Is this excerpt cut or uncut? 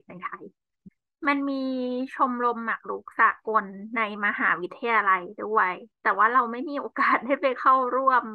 cut